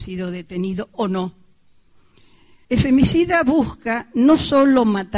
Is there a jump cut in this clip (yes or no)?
yes